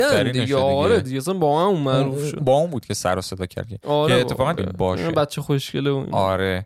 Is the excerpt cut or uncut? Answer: cut